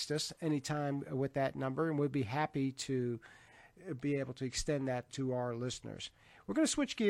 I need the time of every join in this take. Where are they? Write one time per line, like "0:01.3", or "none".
0:05.1